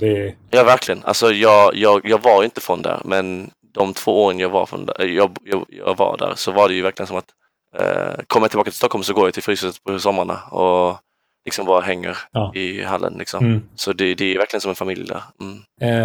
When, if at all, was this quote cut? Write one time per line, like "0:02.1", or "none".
none